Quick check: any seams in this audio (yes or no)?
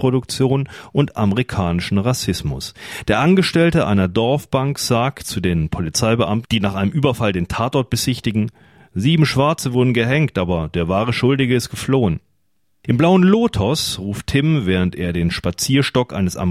no